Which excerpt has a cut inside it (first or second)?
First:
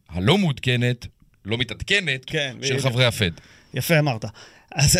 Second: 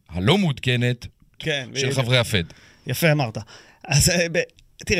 second